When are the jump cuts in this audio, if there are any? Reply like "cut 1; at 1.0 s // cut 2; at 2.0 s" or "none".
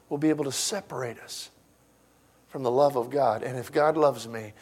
none